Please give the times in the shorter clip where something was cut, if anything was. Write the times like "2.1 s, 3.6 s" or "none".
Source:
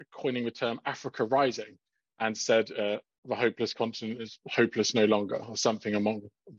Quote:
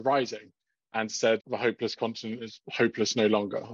1.4 s